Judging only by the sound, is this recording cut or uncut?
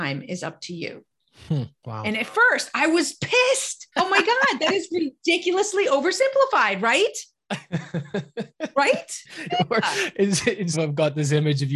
cut